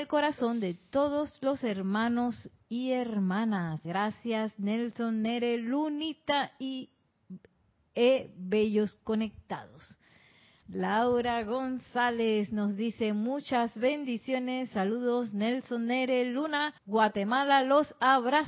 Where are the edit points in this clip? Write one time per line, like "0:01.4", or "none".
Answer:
0:03.8
0:10.6
0:16.8